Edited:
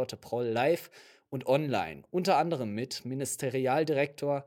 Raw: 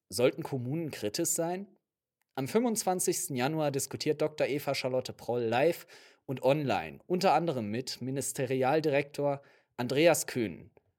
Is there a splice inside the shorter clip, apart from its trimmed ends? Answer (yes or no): no